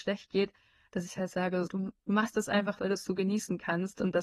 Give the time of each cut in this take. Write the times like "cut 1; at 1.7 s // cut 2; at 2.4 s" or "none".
cut 1; at 1.7 s // cut 2; at 2.8 s